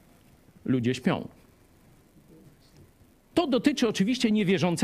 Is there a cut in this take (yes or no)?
yes